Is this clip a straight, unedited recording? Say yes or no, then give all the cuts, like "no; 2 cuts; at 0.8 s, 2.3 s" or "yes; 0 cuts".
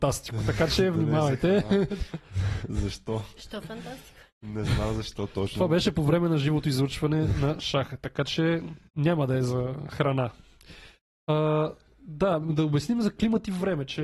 no; 1 cut; at 8.9 s